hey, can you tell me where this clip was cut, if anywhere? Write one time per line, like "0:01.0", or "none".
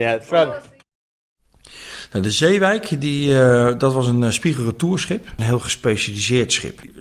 none

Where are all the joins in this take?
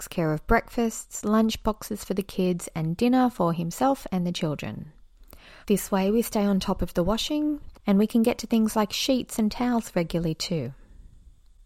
0:05.6
0:07.7

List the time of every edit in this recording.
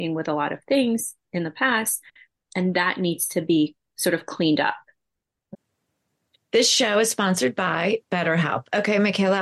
none

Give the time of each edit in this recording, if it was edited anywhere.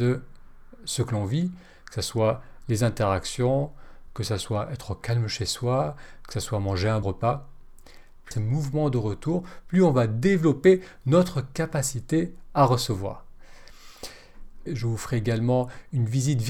0:07.0
0:08.3
0:14.7

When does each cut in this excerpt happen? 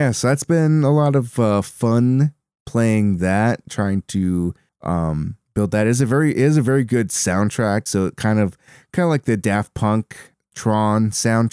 0:07.9

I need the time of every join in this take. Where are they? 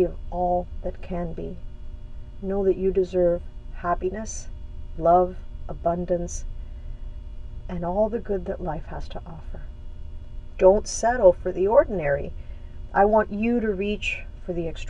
0:04.9

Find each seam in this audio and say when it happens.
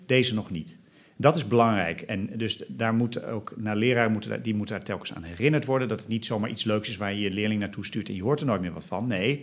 none

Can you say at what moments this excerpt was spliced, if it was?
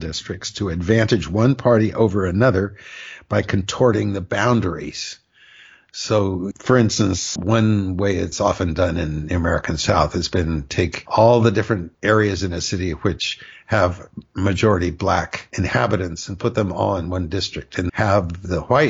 0:07.4
0:17.9

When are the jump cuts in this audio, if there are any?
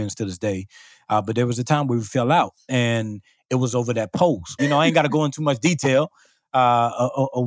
0:04.6

